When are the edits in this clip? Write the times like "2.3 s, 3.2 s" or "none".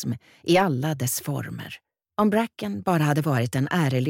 2.0 s